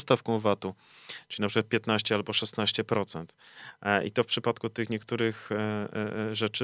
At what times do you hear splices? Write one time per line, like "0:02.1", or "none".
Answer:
none

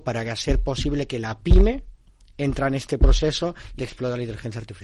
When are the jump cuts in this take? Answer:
0:03.8

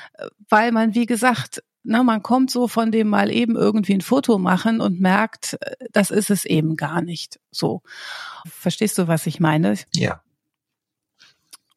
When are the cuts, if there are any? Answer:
0:08.4

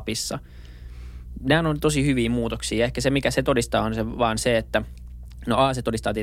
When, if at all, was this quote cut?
none

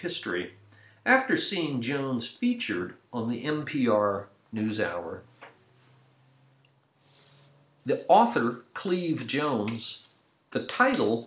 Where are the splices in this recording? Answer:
none

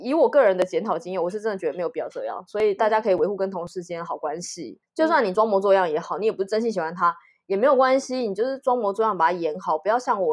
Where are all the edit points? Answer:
0:04.8

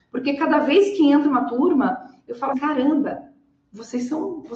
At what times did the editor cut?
0:02.5

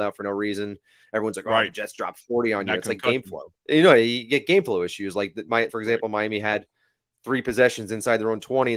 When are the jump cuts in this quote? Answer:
0:03.6
0:05.7

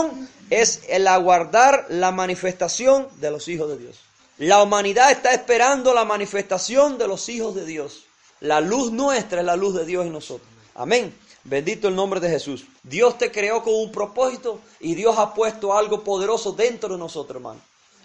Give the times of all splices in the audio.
0:04.2
0:08.3
0:12.8

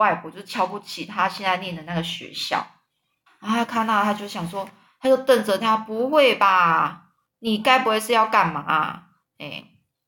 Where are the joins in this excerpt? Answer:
0:03.3

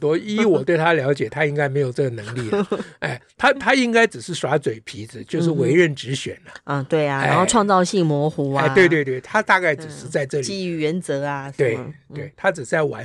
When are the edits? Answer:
none

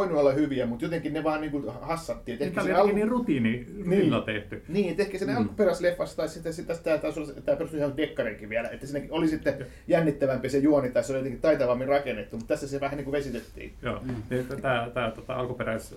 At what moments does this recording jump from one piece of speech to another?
none

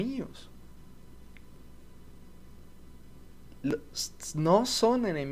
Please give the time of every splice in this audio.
none

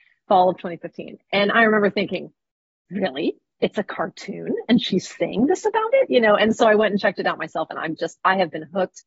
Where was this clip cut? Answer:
none

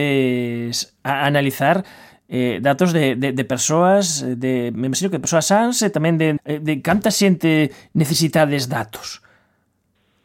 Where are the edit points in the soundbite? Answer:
0:06.4

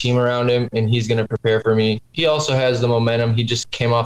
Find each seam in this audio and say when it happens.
none

